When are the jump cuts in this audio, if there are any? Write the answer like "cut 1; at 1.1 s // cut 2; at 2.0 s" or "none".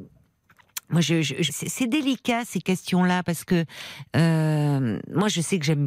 cut 1; at 1.5 s